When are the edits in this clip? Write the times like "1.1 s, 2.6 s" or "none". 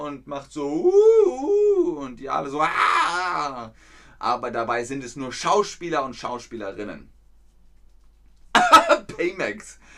none